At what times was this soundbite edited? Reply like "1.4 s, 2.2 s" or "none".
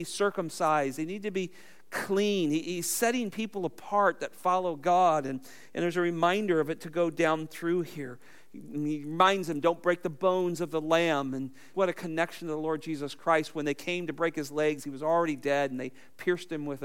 11.7 s